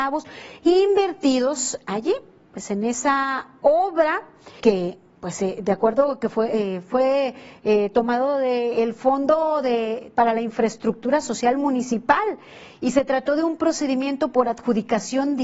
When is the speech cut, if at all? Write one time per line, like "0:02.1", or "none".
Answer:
0:04.6